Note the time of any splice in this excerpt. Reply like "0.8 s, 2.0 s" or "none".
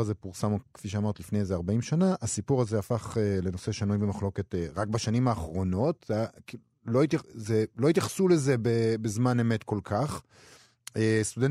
none